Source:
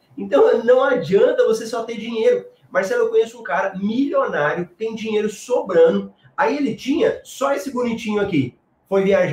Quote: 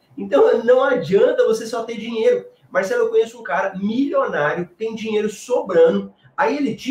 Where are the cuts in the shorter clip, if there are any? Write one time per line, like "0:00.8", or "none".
none